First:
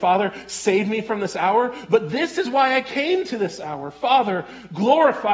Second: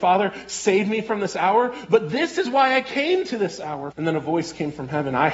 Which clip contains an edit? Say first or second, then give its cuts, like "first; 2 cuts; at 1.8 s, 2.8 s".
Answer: second; 1 cut; at 3.9 s